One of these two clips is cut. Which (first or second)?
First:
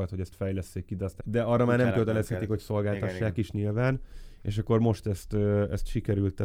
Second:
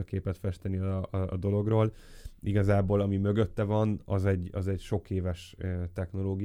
first